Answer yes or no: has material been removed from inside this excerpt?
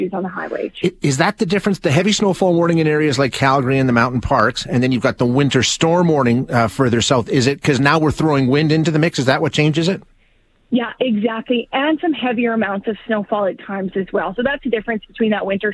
no